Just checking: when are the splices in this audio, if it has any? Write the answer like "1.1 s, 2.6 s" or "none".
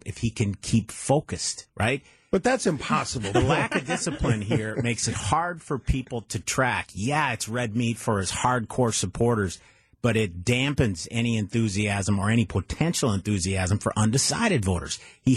none